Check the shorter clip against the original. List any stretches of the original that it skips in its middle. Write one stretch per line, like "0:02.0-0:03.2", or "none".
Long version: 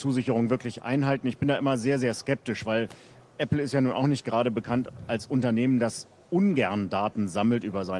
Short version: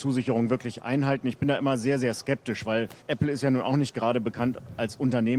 0:03.0-0:03.3